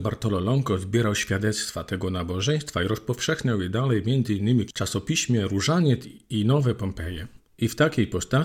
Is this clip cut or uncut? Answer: cut